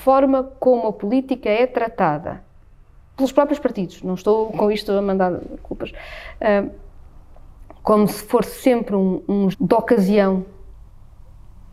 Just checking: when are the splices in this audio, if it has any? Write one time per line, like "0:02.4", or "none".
0:09.5

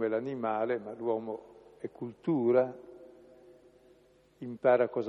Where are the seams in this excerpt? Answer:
none

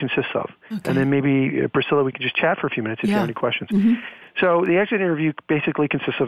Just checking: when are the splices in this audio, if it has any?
none

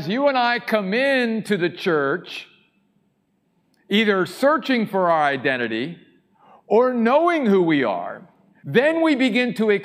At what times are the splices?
0:08.6

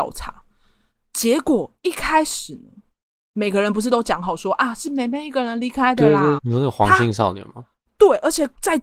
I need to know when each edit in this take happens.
0:06.4

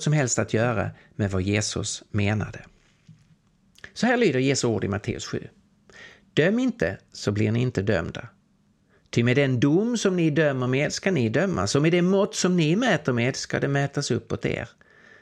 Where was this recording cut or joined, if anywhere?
none

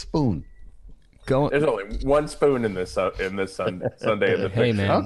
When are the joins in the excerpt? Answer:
none

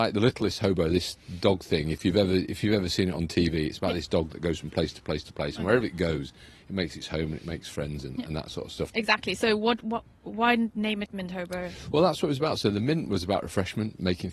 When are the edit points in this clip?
0:08.9

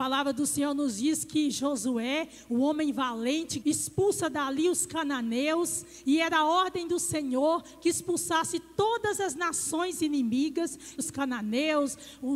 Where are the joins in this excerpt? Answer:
0:03.6
0:11.0

